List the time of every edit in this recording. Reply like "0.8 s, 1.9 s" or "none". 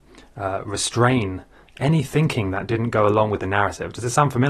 none